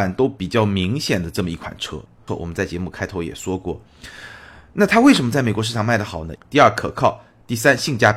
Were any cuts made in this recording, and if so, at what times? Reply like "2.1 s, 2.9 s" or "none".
2.3 s, 6.4 s